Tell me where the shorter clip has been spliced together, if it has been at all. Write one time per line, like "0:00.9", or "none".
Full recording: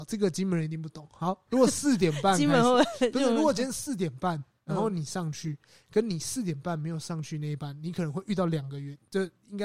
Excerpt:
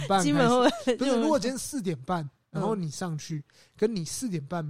none

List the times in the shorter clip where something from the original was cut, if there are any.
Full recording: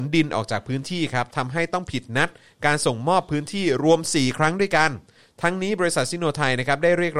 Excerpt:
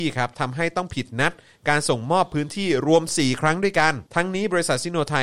0:04.1

